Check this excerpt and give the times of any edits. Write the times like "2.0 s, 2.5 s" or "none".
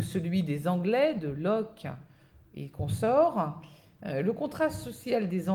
none